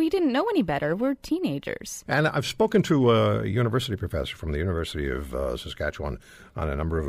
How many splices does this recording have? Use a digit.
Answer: 1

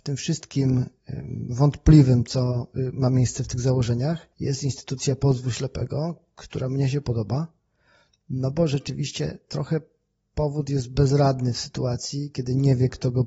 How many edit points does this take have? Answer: 1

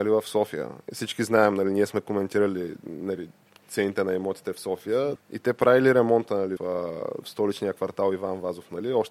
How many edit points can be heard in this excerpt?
2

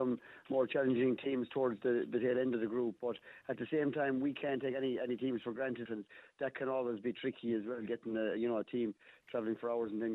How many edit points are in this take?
1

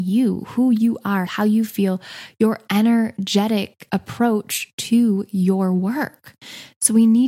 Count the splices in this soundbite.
1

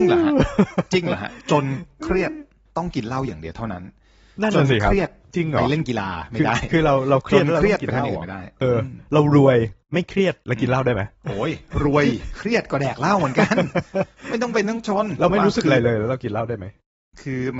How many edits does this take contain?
2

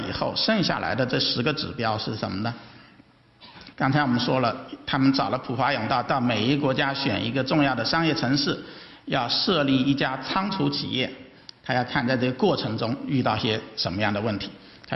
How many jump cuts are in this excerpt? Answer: 1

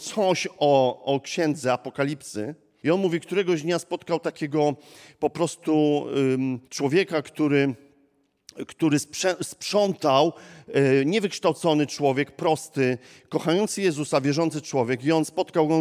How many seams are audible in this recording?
2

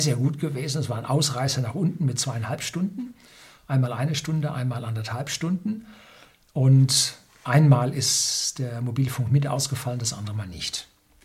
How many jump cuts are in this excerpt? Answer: 0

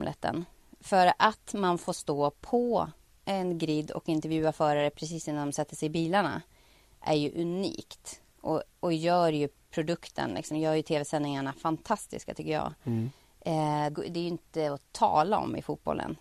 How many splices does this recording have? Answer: 1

